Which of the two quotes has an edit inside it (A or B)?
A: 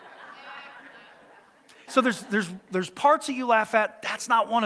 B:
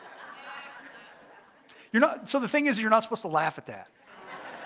A